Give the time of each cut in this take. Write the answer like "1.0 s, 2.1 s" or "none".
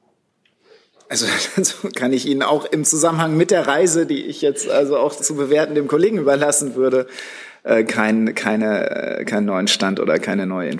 5.2 s

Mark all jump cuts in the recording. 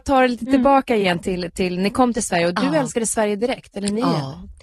none

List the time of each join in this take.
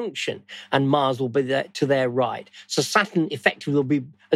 none

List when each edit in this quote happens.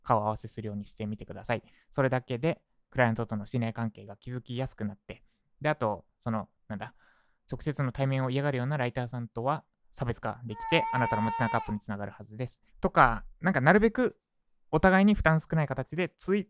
12.7 s

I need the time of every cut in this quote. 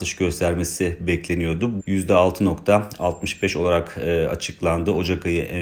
1.8 s

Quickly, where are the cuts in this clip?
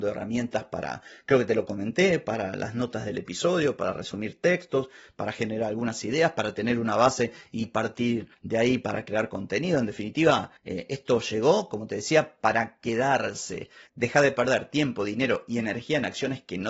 13.9 s

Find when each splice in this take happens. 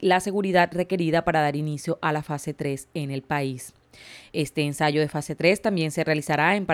none

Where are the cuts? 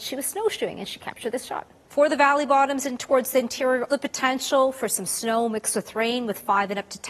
1.9 s, 3.9 s

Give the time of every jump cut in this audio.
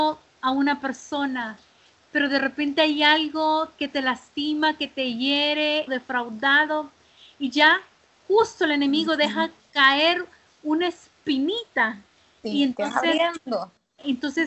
5.9 s

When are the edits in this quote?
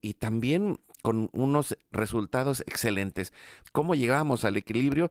3.6 s

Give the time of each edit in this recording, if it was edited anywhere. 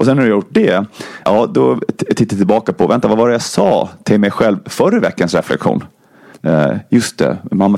1.2 s, 6.3 s

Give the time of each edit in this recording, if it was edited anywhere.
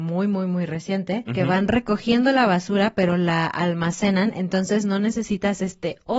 1.3 s

